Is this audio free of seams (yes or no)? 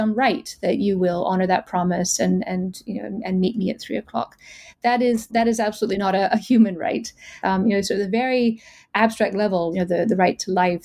no